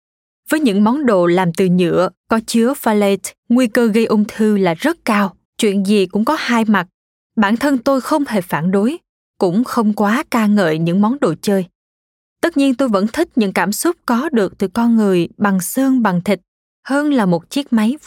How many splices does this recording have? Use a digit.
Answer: 2